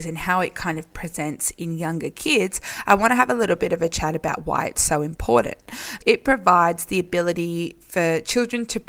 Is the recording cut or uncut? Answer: cut